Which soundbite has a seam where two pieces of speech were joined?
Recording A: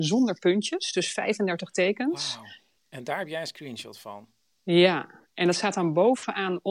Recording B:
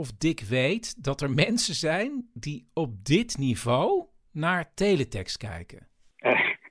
A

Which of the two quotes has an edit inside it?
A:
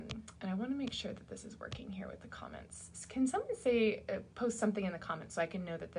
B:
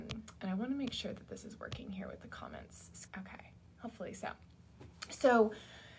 B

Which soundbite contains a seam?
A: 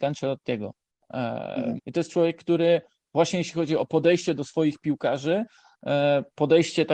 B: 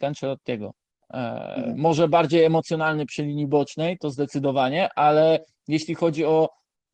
A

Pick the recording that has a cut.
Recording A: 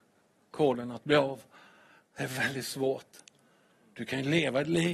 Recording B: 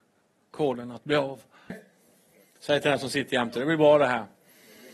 B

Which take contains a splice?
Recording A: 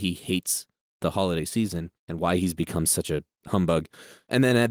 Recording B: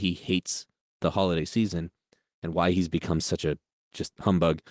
A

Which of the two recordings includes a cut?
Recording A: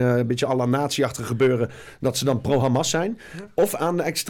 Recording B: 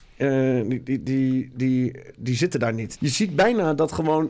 B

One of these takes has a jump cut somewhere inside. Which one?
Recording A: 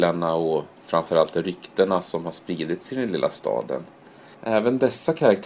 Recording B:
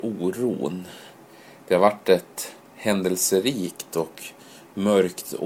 A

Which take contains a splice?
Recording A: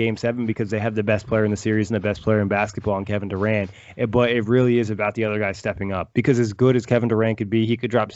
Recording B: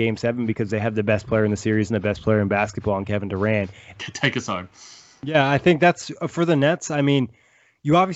B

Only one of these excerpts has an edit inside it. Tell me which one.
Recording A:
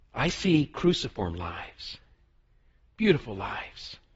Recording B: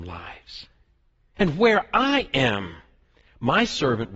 B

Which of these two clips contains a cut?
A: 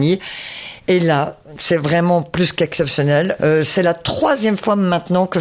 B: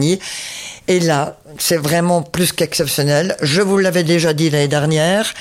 A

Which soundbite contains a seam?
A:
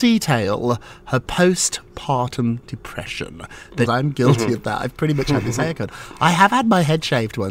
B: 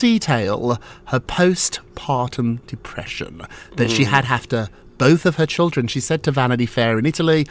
A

